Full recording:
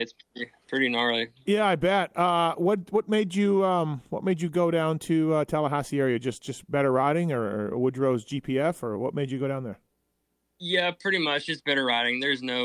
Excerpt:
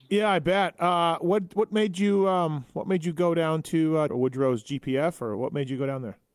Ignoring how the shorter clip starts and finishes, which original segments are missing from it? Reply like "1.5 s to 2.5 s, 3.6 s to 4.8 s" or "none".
5.5 s to 7.7 s